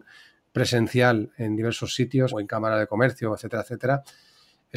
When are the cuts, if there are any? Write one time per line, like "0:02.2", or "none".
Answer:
0:02.3